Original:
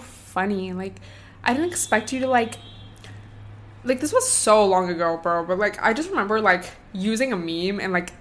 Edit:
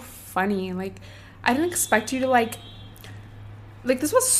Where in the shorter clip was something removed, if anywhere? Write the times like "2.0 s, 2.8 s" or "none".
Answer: none